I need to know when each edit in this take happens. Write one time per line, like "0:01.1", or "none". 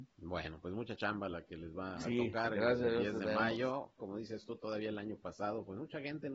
0:04.0